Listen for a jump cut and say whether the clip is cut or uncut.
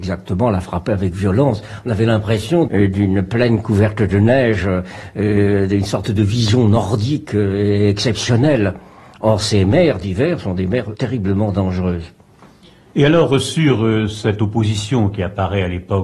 cut